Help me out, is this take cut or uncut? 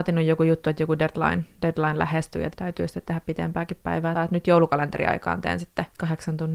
cut